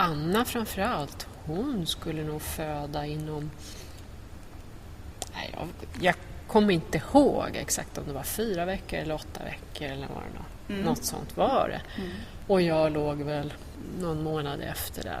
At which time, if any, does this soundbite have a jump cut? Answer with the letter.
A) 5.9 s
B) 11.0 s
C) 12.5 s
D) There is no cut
D